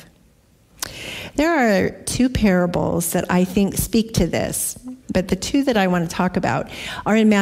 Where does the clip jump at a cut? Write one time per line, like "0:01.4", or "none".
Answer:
0:03.7
0:05.0